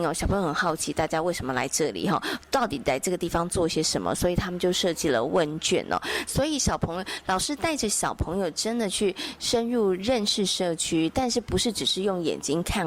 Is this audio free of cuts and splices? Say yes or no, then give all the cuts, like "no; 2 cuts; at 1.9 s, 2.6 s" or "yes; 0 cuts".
no; 1 cut; at 6.3 s